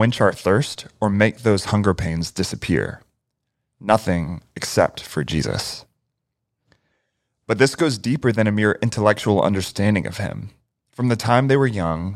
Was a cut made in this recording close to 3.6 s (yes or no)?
no